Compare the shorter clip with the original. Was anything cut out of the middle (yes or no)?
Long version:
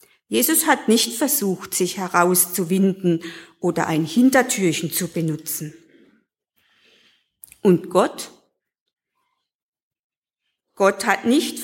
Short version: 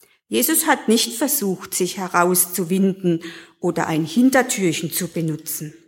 no